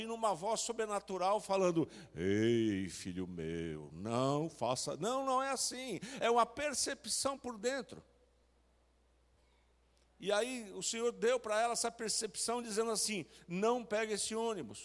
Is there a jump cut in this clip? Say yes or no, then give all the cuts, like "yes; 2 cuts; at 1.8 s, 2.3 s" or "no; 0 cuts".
no; 0 cuts